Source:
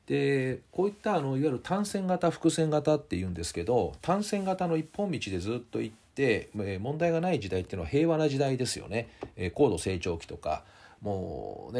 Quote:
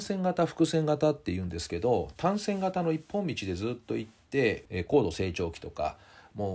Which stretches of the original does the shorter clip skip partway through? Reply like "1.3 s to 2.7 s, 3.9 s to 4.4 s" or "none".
6.5 s to 9.3 s